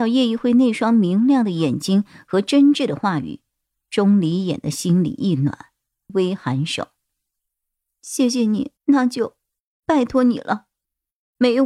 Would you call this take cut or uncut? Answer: cut